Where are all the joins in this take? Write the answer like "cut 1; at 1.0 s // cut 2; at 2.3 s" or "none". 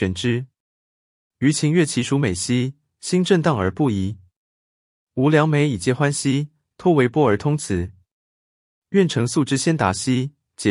none